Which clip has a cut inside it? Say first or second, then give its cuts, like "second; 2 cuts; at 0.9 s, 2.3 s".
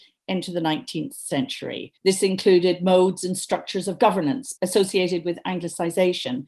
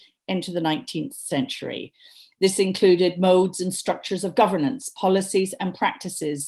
first; 2 cuts; at 2.0 s, 4.6 s